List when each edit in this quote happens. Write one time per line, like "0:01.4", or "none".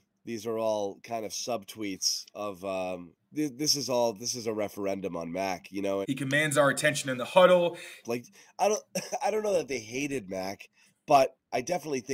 0:03.2
0:06.0
0:08.0